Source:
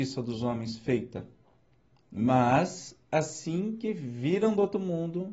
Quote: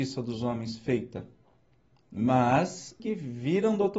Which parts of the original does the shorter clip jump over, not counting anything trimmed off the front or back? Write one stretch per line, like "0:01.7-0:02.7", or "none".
0:03.0-0:03.8